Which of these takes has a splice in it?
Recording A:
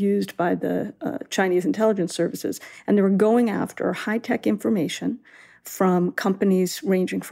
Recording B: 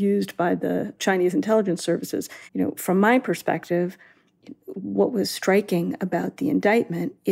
B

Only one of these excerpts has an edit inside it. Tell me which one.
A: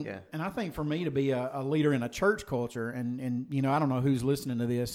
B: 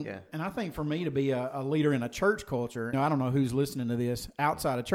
B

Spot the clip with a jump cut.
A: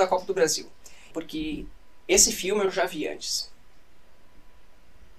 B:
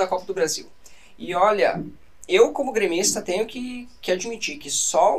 A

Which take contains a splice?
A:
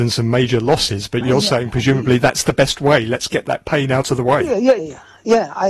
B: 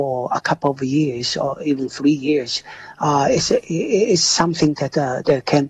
A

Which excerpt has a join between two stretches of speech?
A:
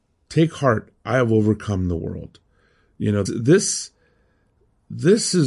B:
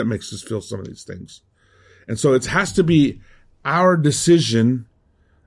A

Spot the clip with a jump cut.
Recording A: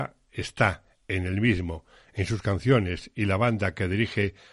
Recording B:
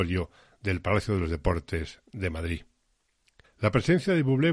B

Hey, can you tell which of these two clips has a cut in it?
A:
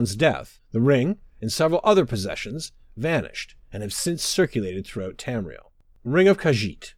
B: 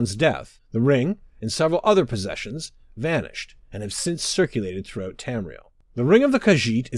B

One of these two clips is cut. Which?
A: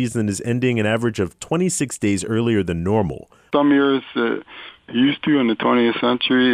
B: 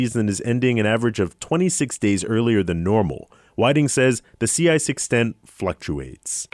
A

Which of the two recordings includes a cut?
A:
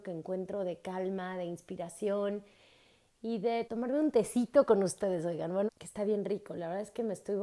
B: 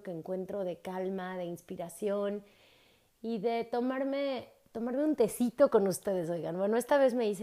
A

